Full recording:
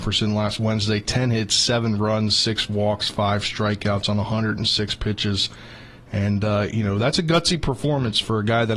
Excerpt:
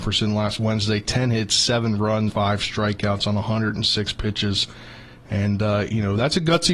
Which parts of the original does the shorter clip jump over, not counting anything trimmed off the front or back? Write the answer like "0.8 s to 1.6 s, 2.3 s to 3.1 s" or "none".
2.3 s to 3.1 s